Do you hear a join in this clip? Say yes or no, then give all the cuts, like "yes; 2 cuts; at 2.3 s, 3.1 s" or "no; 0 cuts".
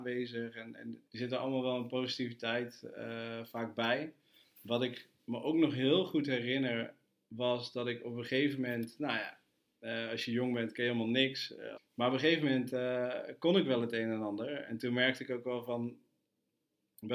yes; 2 cuts; at 1.1 s, 11.8 s